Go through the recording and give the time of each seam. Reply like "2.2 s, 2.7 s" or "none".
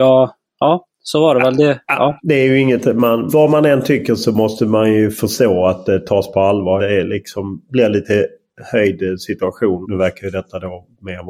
3.3 s, 6.8 s, 9.8 s